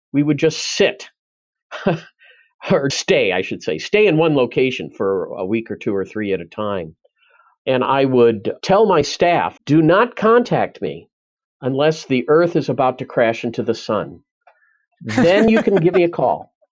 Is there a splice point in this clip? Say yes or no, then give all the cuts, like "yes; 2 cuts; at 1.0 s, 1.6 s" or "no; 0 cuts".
yes; 2 cuts; at 2.9 s, 9.6 s